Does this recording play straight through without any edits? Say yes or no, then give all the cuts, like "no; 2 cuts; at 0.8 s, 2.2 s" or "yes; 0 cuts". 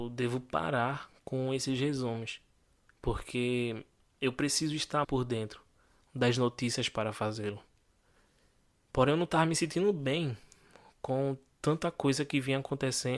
no; 1 cut; at 5.0 s